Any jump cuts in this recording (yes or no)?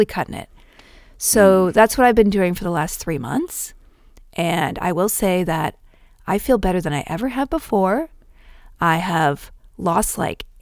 no